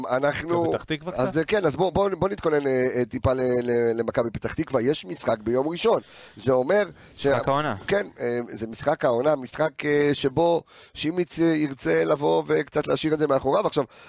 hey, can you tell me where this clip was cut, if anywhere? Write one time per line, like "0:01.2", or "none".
none

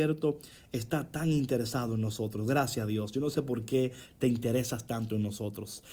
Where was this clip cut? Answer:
none

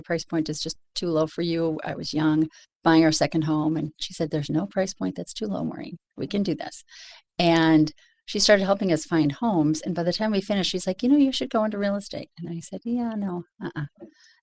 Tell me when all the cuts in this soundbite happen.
none

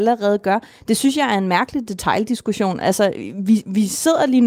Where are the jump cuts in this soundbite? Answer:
none

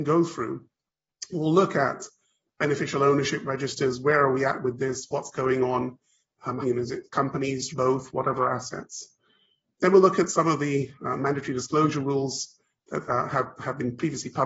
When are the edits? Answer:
0:06.6
0:07.7

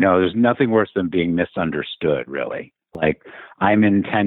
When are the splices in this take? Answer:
none

